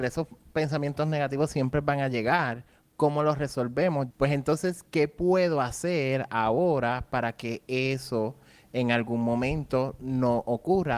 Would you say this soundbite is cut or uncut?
cut